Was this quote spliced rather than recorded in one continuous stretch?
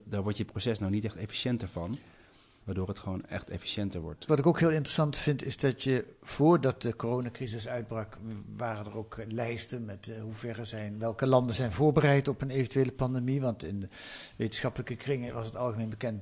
yes; 2 cuts; at 2.6 s, 4.3 s

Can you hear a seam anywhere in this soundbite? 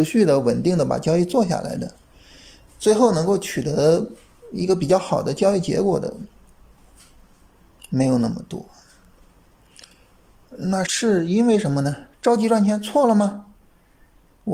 yes; 2 cuts; at 10.9 s, 12.1 s

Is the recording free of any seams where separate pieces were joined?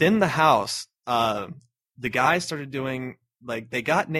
yes; 0 cuts

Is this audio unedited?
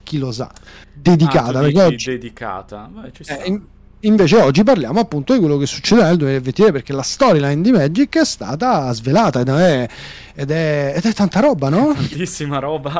yes; 0 cuts

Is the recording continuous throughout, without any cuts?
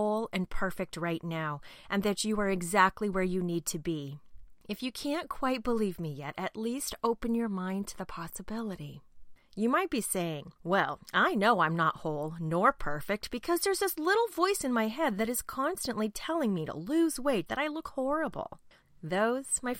no; 2 cuts; at 10.6 s, 17.5 s

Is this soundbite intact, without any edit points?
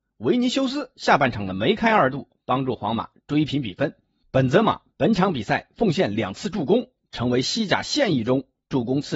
yes; 0 cuts

